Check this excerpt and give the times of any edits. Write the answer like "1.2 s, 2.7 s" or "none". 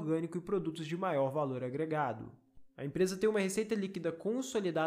2.7 s